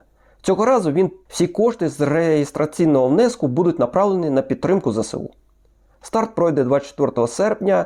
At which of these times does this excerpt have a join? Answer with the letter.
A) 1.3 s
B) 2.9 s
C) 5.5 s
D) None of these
A